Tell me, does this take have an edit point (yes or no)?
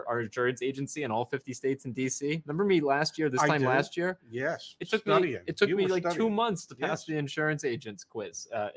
no